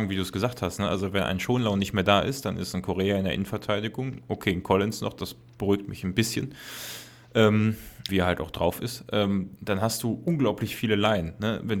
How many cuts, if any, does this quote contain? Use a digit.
2